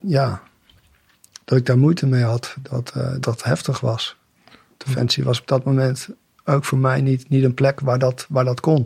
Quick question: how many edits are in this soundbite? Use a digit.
1